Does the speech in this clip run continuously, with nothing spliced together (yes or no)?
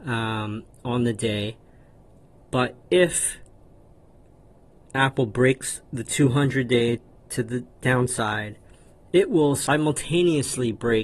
yes